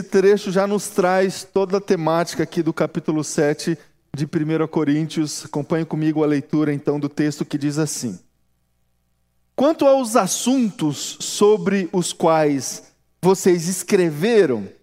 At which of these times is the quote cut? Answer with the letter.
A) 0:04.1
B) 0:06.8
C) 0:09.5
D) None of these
D